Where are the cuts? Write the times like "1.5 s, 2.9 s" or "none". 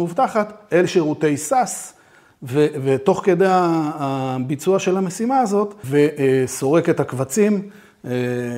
5.8 s

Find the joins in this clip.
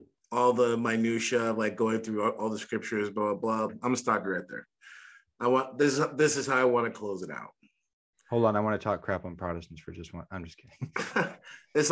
3.7 s

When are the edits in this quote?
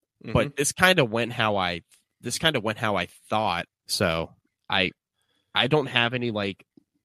3.7 s

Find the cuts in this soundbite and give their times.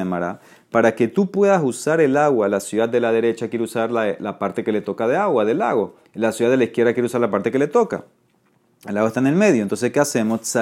none

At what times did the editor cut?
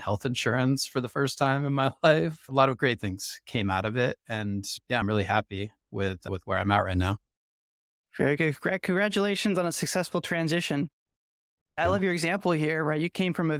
none

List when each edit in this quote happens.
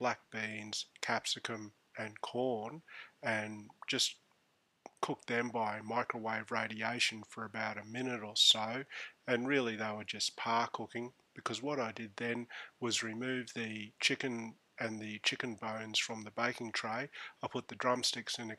none

